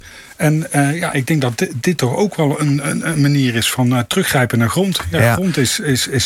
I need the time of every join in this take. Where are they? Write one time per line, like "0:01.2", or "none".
none